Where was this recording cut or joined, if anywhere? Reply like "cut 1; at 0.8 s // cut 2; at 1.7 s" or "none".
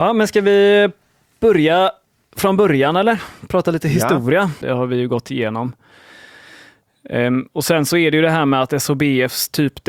cut 1; at 4.6 s